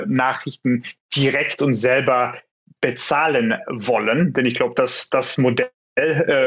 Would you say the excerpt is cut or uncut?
uncut